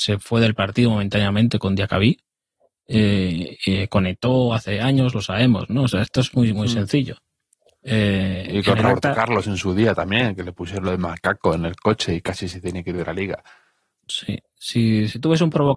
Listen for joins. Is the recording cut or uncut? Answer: uncut